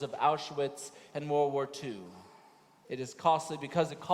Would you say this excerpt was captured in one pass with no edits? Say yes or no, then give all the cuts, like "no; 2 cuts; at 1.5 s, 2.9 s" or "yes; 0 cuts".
no; 1 cut; at 2.8 s